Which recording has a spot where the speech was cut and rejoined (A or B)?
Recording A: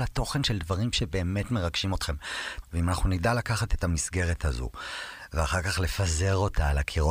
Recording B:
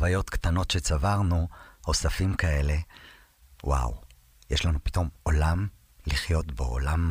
A